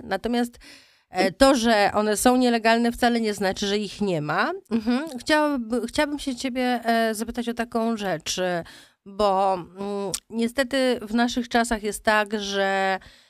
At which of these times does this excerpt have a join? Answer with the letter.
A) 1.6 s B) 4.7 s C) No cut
B